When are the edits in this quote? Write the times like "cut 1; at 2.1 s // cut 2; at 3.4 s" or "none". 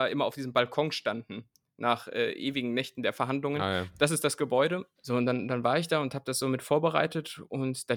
cut 1; at 5.0 s